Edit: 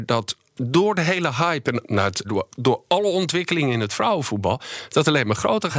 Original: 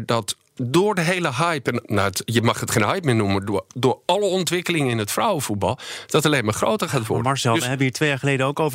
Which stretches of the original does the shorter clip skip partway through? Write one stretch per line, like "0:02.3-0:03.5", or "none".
0:02.2-0:03.4